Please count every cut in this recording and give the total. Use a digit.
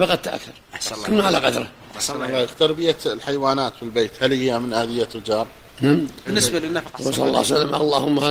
1